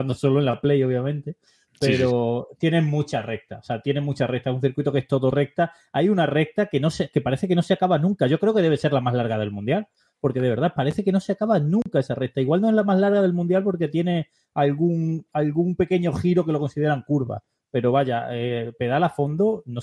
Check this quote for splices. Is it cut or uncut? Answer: uncut